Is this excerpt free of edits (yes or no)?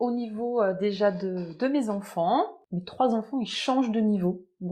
yes